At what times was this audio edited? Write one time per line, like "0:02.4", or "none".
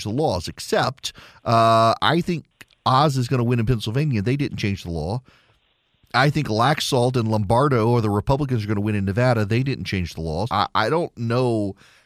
0:10.5